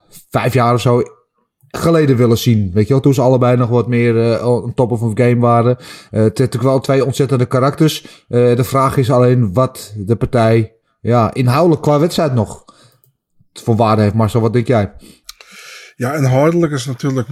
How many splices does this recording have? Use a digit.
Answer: 0